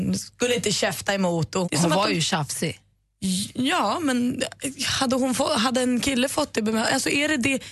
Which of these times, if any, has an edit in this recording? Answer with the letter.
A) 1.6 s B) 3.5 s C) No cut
A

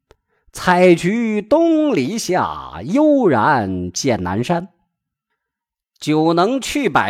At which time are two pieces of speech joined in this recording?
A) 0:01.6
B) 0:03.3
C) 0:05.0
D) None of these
D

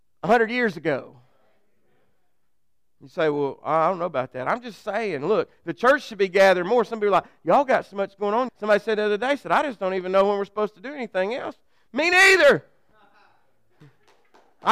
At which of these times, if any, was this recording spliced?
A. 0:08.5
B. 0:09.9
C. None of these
A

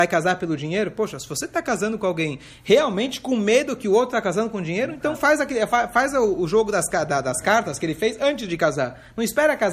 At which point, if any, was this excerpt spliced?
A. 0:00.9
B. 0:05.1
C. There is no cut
B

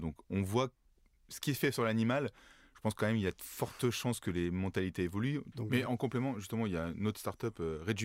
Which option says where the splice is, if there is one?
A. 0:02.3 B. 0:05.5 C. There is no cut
B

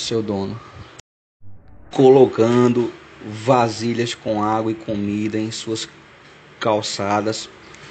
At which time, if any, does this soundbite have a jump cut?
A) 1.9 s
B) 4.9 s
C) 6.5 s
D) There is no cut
A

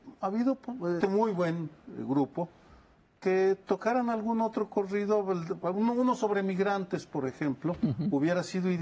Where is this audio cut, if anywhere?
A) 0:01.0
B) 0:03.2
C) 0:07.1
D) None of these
A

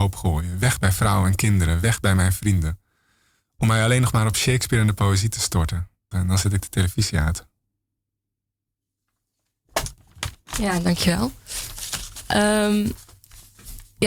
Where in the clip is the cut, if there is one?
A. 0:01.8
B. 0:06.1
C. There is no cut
B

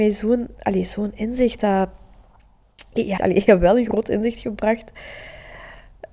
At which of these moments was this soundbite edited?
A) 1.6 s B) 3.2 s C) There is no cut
B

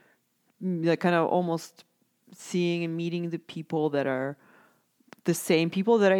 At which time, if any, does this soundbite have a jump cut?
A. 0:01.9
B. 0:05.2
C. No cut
C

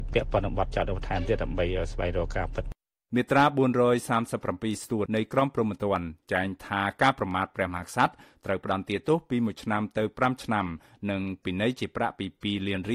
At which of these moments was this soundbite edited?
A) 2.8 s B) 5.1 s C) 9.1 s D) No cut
B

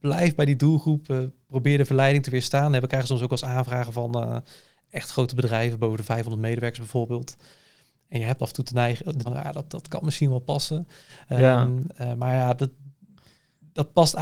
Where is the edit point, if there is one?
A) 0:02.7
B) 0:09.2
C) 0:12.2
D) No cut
B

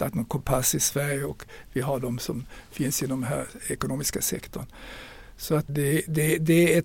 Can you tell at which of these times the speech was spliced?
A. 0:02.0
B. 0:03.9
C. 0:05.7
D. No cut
C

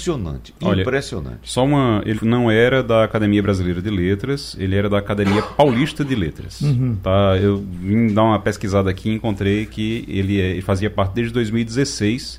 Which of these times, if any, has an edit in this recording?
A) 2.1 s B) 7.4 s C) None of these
A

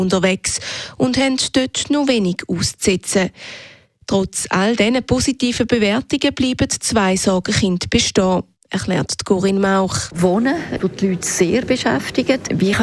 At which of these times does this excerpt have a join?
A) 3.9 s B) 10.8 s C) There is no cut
B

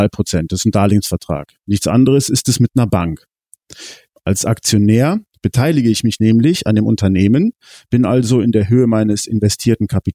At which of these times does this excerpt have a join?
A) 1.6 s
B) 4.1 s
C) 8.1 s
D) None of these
B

